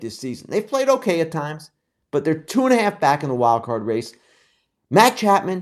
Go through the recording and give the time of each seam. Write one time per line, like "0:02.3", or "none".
none